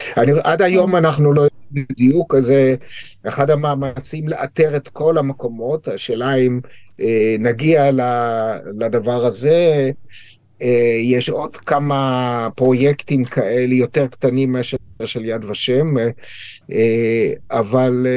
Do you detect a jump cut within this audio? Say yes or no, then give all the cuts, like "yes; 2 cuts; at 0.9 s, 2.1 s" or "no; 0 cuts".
no; 0 cuts